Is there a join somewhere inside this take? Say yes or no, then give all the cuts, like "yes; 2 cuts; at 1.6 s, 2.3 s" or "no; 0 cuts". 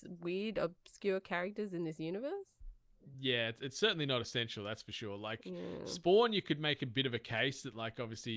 no; 0 cuts